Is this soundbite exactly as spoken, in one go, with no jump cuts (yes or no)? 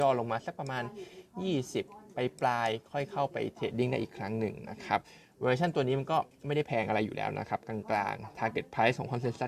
yes